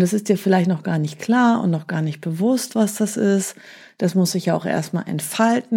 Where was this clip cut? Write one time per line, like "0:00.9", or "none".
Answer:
none